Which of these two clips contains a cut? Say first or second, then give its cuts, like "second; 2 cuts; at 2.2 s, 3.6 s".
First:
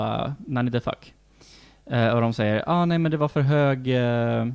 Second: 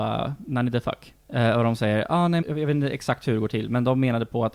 second; 2 cuts; at 1.2 s, 2.4 s